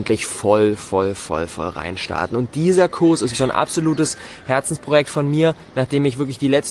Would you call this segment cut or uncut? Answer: cut